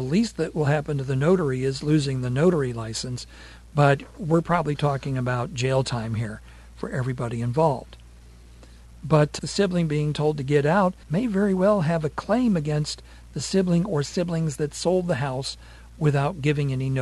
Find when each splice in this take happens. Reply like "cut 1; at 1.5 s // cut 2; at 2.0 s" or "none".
cut 1; at 9.4 s // cut 2; at 11.0 s